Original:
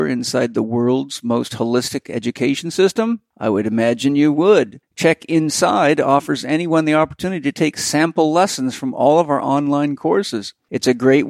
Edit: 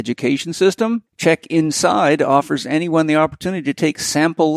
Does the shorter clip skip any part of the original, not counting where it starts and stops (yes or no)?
yes